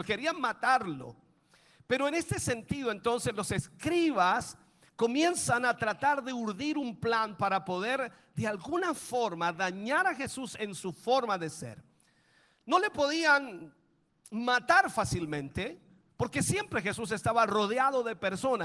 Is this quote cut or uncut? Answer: uncut